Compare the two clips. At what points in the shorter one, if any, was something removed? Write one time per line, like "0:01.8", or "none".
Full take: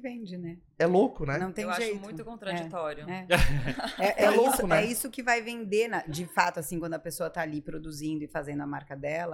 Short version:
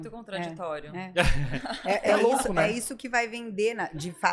none

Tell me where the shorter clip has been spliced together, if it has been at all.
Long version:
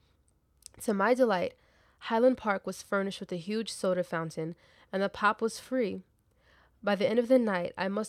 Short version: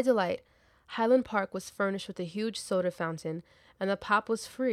none

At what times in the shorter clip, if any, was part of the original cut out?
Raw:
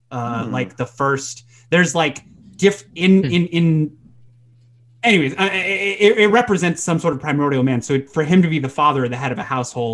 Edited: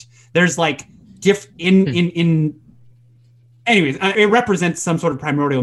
0:04.1

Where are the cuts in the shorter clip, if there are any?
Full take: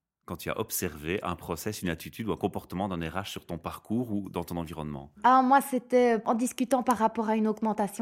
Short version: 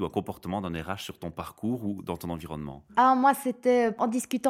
none

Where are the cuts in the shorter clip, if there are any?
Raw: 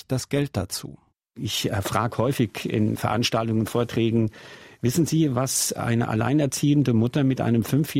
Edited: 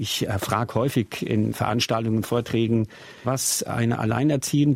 0:03.2

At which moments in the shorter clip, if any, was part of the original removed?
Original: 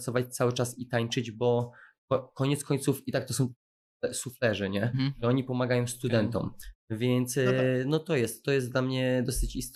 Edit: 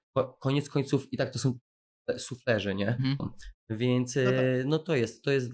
0:03.2

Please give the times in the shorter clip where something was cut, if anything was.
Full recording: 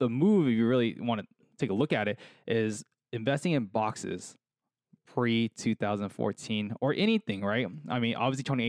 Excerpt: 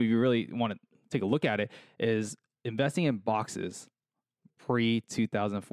none

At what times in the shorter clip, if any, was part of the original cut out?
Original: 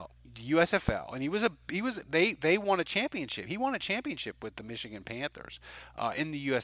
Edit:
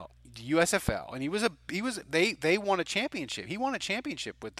none

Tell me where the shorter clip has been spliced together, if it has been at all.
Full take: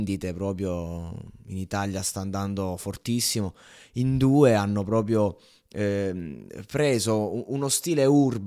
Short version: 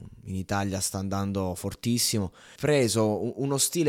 0:02.6

